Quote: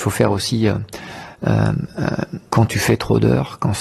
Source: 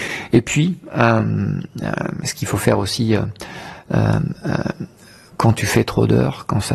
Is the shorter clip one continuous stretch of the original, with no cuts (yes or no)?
no